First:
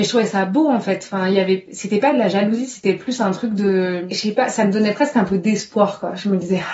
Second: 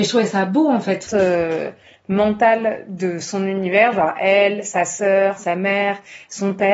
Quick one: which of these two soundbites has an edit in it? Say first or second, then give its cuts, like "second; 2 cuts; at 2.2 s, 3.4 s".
second; 1 cut; at 1.1 s